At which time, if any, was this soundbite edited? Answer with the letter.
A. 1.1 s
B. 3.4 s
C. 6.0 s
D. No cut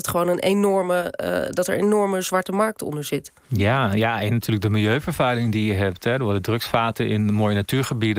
B